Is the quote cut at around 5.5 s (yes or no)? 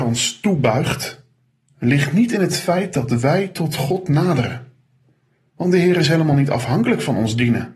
no